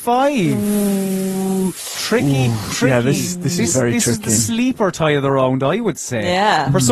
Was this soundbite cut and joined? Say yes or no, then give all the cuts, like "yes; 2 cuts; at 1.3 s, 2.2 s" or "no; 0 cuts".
no; 0 cuts